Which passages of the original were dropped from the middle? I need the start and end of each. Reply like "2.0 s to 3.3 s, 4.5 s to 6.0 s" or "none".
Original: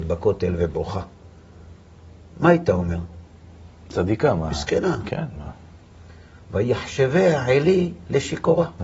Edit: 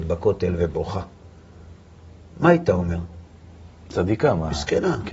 none